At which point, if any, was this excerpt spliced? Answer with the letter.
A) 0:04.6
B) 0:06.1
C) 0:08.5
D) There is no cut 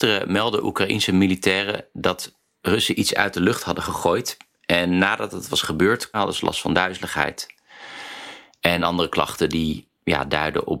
B